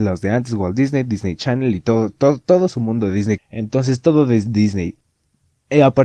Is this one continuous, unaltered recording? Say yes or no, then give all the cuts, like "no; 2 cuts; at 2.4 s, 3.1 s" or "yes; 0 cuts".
no; 1 cut; at 3.4 s